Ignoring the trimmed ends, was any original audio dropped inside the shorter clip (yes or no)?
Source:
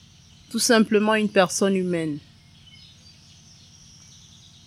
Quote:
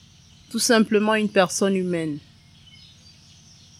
no